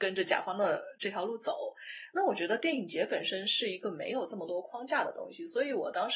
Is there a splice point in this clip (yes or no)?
no